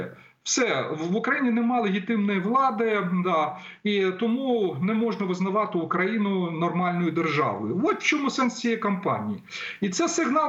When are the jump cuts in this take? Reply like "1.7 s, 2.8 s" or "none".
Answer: none